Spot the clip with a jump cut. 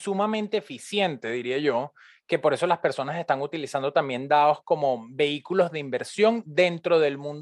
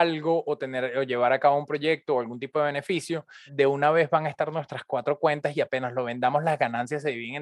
second; 1 cut; at 3.5 s

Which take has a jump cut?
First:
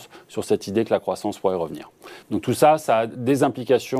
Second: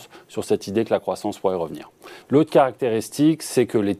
second; 1 cut; at 2.2 s

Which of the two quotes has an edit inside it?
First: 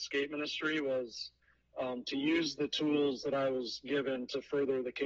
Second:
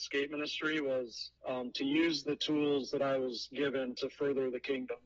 second; 1 cut; at 1.4 s

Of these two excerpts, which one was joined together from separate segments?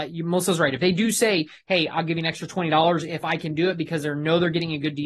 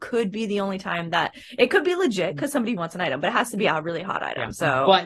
second; 1 cut; at 2.8 s

